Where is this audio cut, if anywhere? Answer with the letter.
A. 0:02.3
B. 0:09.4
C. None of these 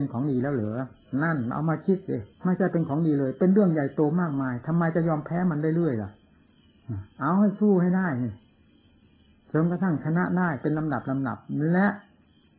A